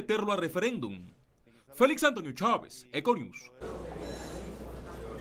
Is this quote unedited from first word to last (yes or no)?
yes